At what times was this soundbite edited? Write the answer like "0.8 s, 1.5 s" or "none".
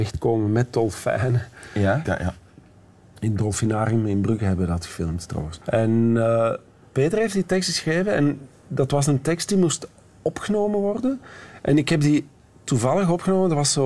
2.0 s, 5.6 s